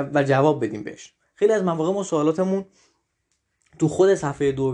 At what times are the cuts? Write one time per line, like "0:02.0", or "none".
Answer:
none